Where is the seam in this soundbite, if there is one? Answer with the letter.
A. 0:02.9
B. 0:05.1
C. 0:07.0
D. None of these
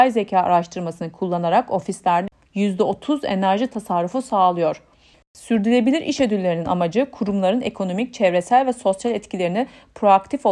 B